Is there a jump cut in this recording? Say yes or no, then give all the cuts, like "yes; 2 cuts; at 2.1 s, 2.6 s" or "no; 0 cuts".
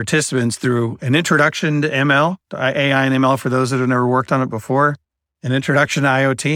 no; 0 cuts